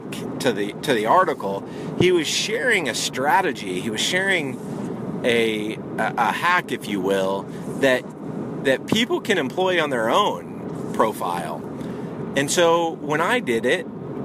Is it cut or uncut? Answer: cut